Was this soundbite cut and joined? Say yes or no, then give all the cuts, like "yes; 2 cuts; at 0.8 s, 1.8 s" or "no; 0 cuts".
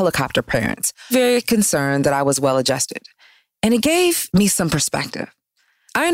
yes; 1 cut; at 1.1 s